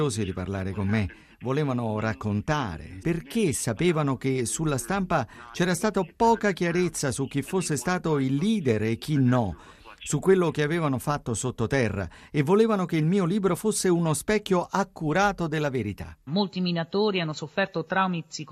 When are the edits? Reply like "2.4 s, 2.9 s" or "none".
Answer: 3.0 s, 16.3 s